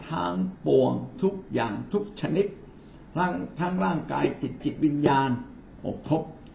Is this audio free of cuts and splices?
no; 1 cut; at 4.6 s

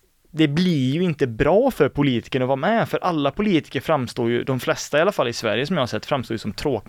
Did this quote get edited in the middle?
no; 0 cuts

